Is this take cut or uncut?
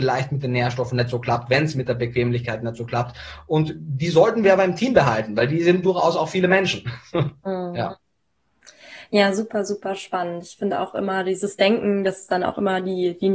uncut